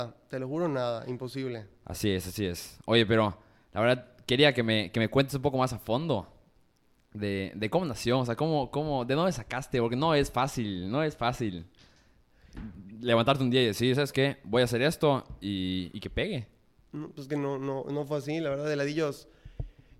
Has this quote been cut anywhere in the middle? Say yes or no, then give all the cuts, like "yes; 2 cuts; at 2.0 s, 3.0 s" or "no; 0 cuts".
no; 0 cuts